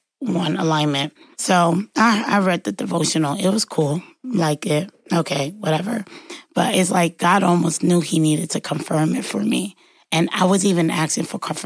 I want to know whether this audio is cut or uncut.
cut